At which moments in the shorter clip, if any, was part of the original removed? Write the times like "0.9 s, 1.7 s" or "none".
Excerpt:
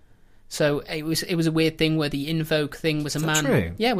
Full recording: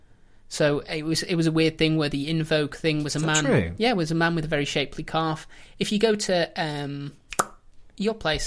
none